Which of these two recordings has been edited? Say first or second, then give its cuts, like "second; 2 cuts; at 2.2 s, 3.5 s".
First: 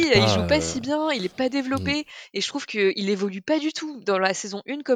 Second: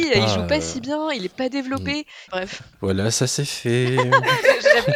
second; 1 cut; at 2.3 s